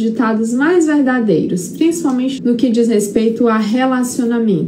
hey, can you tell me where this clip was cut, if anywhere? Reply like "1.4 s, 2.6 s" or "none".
2.4 s